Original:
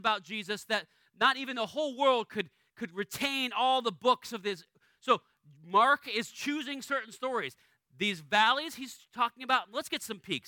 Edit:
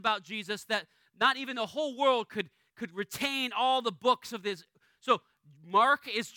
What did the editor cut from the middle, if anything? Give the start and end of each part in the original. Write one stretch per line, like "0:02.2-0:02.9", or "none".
none